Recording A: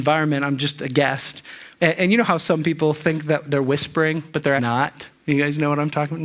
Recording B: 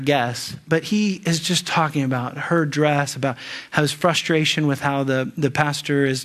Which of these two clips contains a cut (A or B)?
A